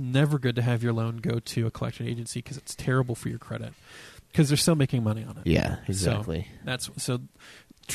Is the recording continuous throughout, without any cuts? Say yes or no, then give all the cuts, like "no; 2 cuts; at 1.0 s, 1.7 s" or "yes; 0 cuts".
no; 1 cut; at 4.2 s